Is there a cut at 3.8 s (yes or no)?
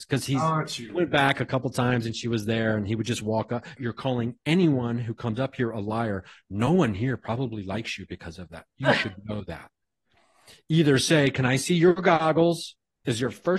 yes